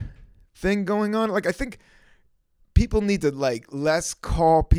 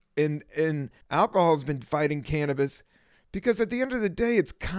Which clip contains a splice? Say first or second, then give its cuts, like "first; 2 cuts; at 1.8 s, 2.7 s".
second; 1 cut; at 1.0 s